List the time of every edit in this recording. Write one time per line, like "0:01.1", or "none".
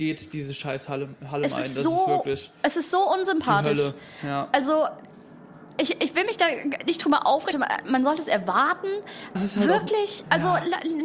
0:07.5
0:09.4

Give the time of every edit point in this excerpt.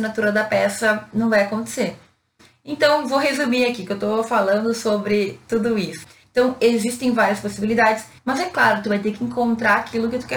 0:06.2
0:08.2

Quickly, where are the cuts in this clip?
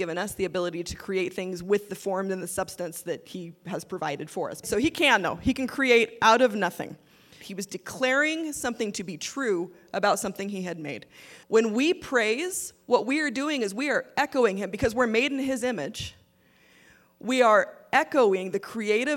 0:04.6
0:07.4
0:11.4

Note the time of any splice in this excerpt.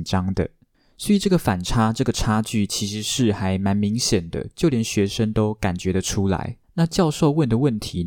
0:06.6

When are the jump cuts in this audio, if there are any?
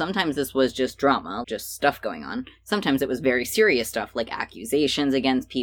0:01.4

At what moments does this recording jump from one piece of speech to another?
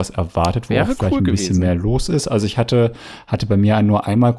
none

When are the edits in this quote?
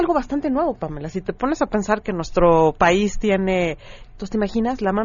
0:04.1

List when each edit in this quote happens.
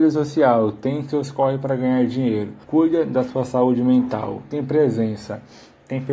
0:02.6

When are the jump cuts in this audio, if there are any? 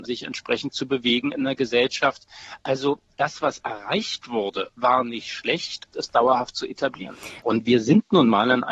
0:05.9
0:07.4

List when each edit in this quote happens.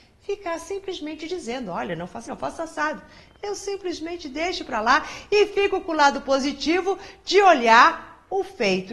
0:02.3

